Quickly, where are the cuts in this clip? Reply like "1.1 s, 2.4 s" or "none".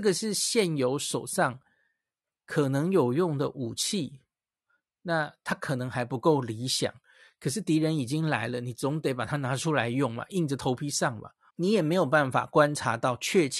11.5 s

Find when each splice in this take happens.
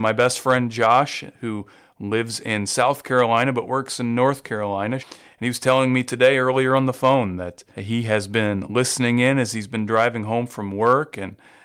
5.0 s, 7.7 s

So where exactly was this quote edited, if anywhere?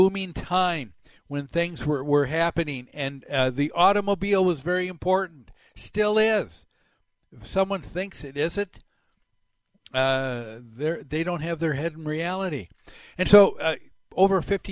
none

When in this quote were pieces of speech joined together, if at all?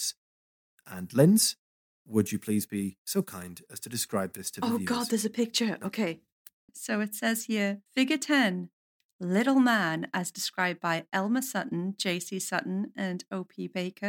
6.7 s, 7.8 s

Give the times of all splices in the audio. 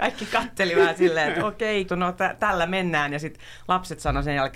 1.9 s

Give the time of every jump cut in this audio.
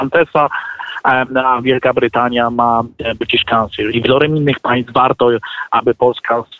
3.9 s

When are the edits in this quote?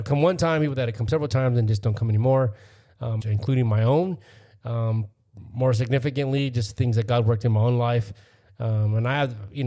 3.2 s, 8.5 s

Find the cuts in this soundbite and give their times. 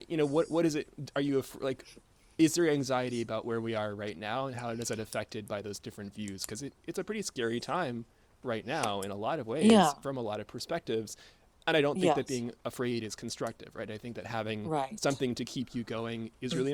none

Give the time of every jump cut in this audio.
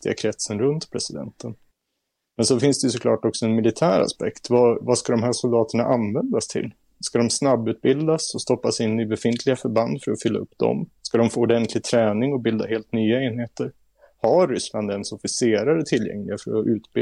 11.0 s

